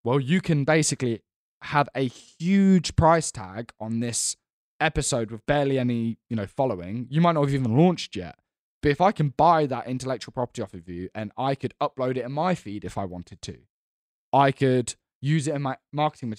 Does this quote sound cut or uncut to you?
uncut